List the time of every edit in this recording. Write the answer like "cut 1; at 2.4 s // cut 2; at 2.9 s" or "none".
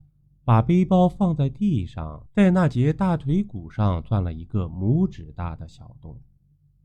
cut 1; at 2.3 s